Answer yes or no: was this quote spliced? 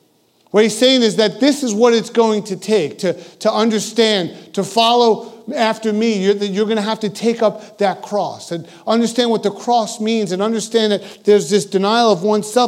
no